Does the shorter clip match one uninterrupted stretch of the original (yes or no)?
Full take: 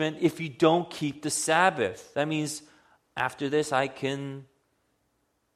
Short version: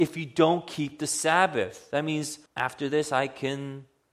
no